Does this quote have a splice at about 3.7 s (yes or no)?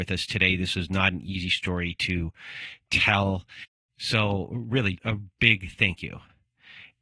no